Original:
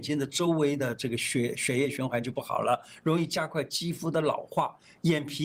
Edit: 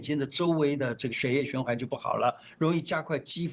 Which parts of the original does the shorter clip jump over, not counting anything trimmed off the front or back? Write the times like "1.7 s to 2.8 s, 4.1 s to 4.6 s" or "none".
1.1 s to 1.5 s